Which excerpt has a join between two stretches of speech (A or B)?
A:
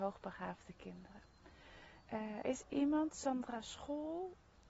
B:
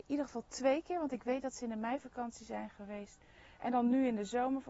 A